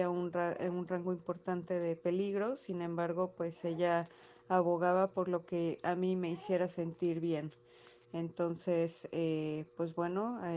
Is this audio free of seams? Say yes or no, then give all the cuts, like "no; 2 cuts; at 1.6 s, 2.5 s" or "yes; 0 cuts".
yes; 0 cuts